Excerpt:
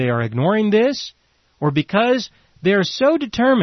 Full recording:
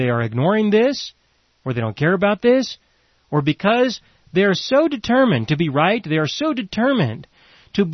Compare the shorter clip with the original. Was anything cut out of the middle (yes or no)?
yes